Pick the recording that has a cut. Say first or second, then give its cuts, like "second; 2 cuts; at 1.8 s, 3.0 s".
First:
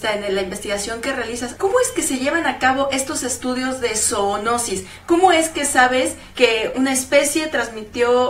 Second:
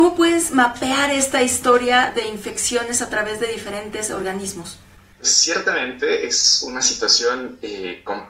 first; 1 cut; at 1.6 s